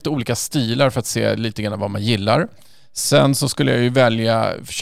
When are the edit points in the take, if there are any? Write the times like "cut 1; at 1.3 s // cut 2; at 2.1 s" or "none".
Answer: none